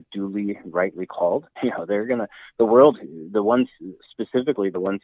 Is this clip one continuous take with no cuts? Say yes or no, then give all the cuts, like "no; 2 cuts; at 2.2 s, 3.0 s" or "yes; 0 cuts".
no; 1 cut; at 1.6 s